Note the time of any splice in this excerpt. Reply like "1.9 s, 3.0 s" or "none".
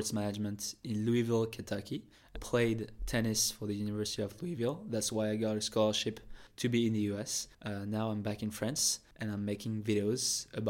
2.3 s